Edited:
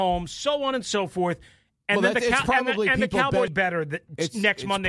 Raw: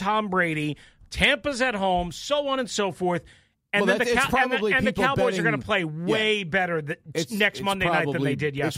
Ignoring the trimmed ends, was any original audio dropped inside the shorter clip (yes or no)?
yes